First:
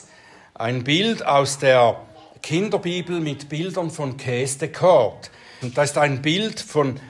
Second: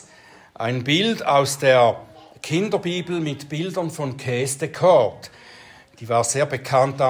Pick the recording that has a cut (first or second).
first